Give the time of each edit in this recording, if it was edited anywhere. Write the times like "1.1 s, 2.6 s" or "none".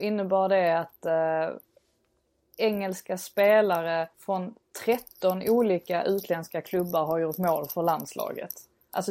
4.1 s

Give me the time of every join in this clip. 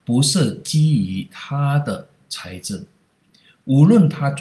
none

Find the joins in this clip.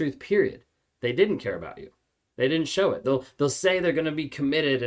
3.0 s

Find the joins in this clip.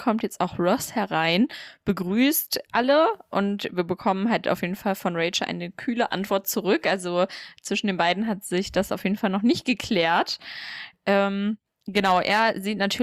none

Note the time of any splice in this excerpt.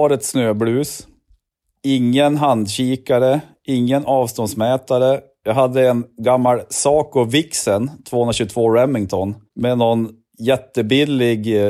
none

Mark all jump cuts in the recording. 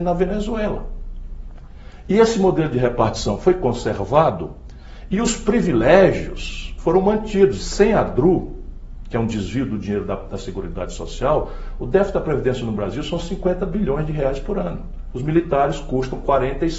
7.6 s, 15.1 s

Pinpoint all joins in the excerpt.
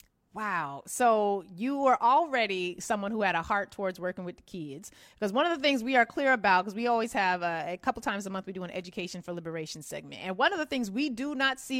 none

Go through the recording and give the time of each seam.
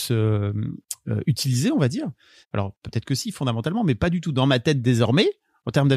2.4 s

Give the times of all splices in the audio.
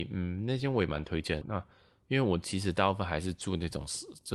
1.4 s

